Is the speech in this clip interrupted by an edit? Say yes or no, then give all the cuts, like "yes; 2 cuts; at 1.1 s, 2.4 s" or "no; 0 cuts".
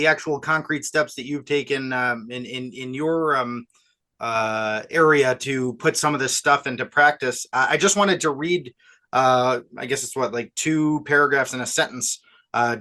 no; 0 cuts